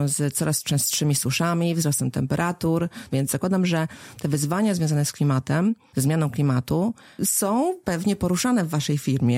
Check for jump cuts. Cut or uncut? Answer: cut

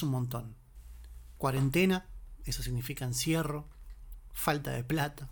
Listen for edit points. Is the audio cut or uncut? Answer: uncut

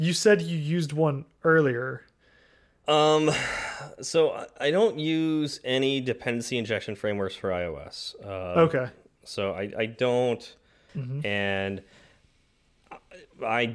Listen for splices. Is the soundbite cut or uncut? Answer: cut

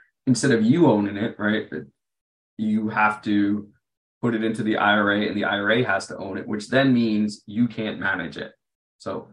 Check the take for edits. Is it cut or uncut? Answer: uncut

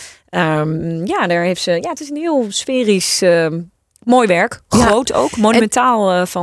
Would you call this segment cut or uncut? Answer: uncut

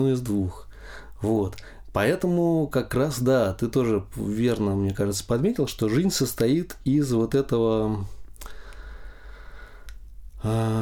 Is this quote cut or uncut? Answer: uncut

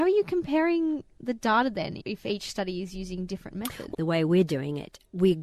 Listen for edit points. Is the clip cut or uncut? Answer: cut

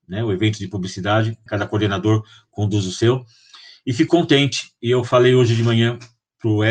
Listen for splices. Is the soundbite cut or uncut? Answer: cut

